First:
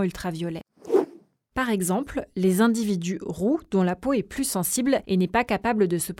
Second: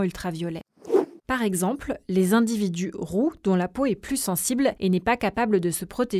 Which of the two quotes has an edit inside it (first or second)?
second